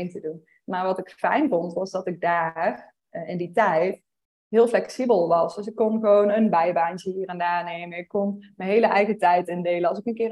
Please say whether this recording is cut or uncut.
uncut